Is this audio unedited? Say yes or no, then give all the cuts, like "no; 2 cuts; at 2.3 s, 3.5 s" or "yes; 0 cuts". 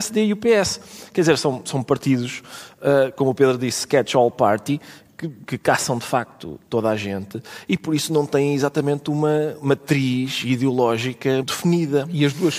no; 2 cuts; at 5.5 s, 11.4 s